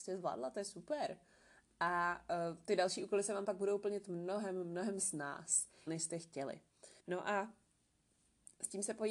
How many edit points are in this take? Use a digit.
2